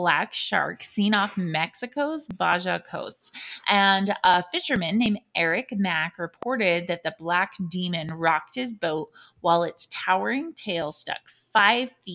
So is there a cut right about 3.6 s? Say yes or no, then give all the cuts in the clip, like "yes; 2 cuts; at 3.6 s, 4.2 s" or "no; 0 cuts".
yes; 1 cut; at 3.6 s